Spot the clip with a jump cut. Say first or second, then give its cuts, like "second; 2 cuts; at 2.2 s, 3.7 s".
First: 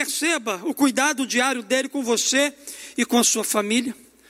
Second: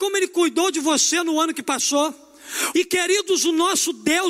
second; 1 cut; at 2.7 s